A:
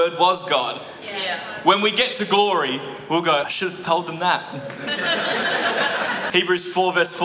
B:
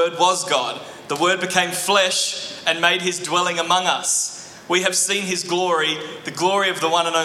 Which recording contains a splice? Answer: A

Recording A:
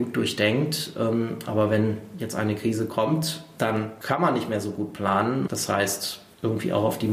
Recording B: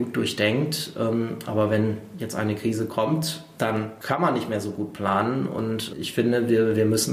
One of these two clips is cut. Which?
A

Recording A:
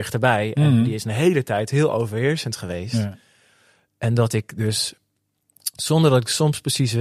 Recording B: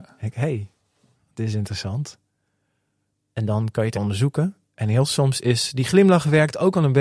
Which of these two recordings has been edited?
B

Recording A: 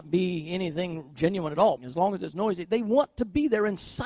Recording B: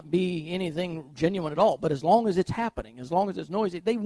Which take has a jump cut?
A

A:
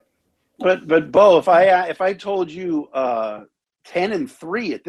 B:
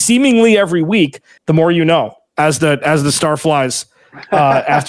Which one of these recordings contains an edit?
B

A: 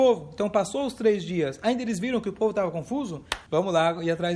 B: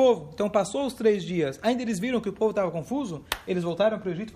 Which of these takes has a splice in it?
A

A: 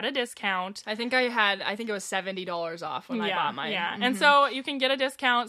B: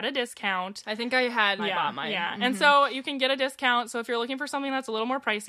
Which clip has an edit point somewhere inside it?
B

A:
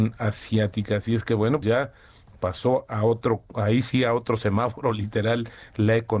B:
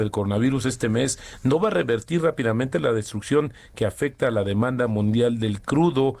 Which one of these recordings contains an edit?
A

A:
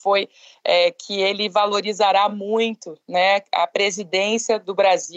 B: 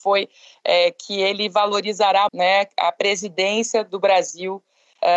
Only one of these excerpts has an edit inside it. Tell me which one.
B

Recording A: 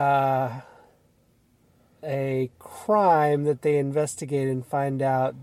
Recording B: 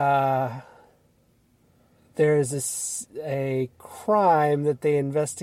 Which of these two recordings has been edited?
A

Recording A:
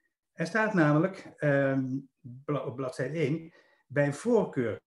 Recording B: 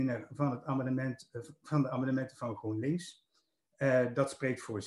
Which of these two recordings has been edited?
A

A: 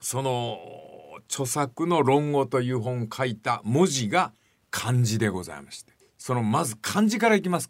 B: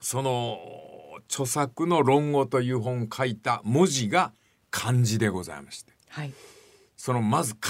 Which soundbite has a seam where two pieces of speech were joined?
A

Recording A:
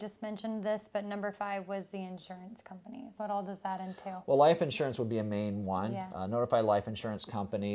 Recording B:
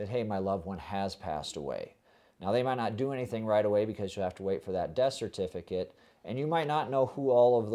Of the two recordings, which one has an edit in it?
A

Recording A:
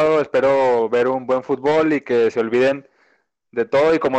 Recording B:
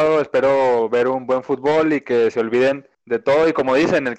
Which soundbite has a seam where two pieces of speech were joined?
B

